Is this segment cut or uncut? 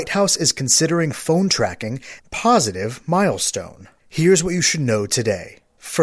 cut